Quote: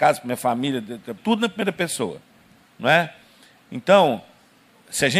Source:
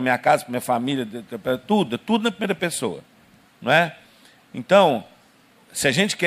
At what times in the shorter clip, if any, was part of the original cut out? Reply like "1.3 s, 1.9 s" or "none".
1.2 s